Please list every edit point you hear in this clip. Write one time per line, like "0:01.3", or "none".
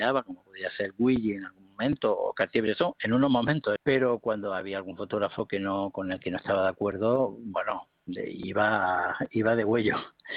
0:03.8